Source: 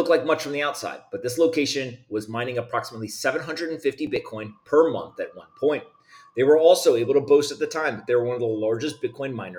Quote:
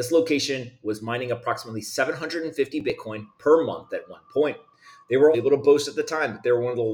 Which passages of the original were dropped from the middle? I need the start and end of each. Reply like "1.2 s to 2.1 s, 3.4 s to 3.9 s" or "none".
6.6 s to 7.0 s